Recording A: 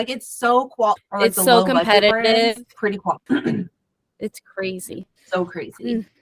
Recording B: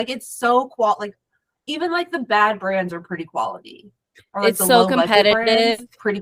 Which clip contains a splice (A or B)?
A